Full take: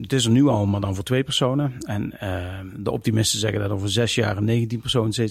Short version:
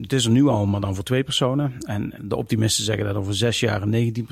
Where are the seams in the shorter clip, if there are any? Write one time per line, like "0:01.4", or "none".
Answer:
0:02.2